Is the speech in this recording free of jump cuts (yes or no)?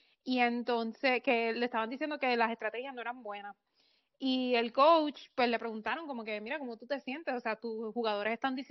yes